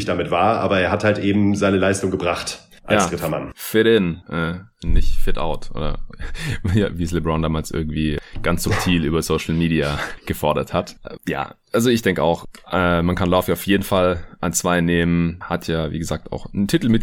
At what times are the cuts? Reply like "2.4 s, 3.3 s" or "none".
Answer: none

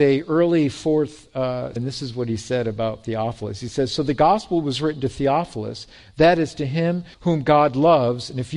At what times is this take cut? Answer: 1.8 s, 7.1 s

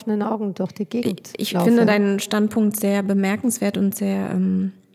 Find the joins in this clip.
none

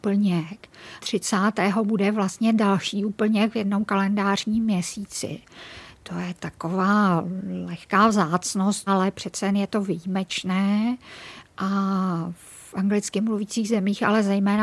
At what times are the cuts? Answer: 1.0 s, 8.9 s

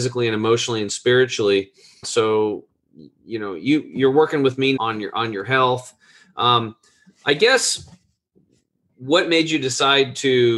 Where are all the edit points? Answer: 2.0 s, 4.8 s

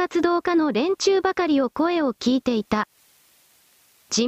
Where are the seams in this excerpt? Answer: none

